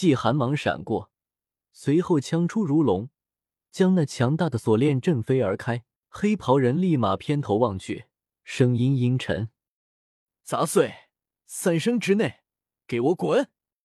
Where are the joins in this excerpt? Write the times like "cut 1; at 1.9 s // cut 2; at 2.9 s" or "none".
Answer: cut 1; at 6.0 s